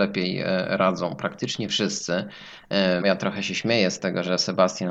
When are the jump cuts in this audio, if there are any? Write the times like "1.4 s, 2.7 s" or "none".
3.0 s